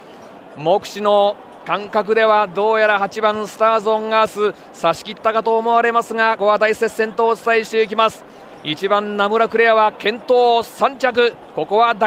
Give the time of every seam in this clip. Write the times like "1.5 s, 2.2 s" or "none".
6.4 s